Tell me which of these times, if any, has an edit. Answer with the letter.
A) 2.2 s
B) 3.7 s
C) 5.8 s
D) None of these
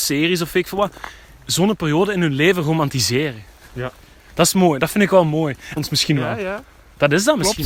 C